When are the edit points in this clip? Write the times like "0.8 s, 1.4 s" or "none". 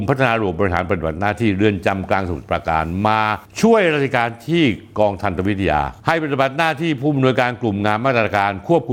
6.0 s